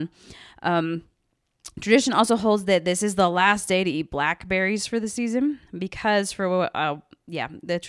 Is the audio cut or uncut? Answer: cut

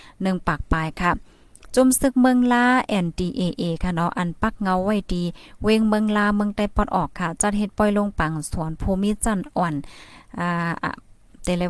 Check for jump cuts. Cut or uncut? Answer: uncut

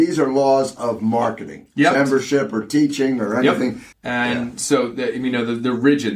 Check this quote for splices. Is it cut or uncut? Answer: cut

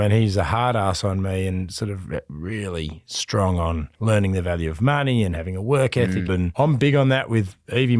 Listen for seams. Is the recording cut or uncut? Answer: cut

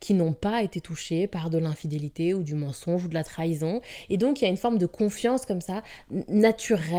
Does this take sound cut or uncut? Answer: uncut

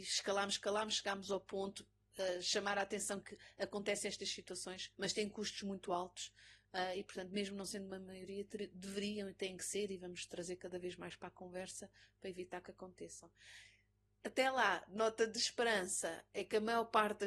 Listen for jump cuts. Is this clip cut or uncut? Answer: cut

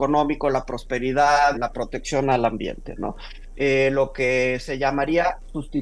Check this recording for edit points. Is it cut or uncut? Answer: cut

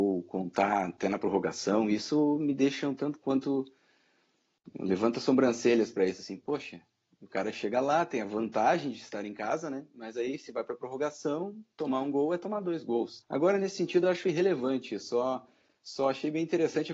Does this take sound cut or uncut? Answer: cut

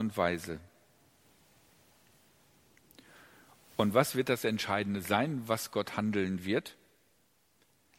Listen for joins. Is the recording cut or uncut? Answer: uncut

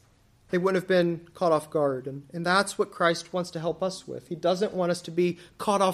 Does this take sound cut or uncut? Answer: uncut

